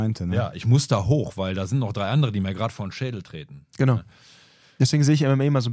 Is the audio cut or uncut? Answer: uncut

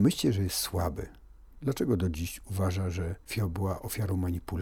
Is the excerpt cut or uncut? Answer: cut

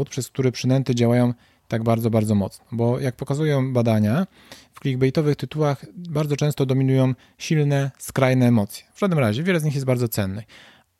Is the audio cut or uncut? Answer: cut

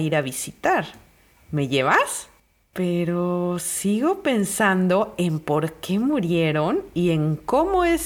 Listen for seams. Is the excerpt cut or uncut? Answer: cut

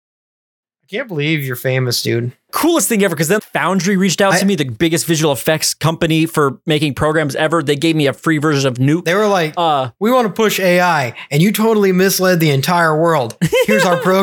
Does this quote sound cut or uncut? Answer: cut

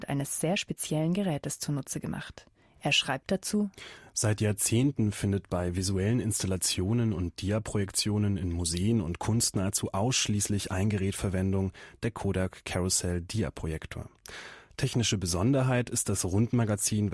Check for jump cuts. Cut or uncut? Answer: uncut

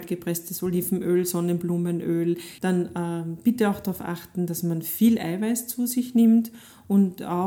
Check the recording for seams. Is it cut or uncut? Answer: cut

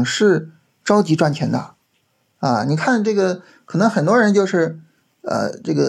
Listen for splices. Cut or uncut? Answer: uncut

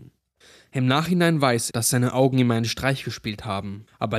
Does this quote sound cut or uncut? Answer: cut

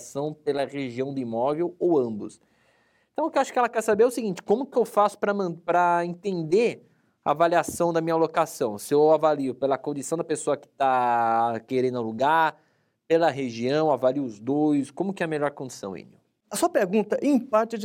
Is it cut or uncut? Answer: uncut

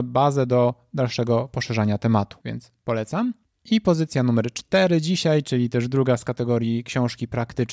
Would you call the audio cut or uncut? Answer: uncut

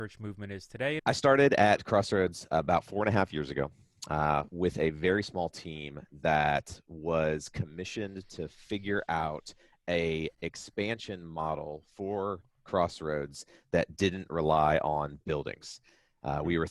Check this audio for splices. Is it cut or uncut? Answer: cut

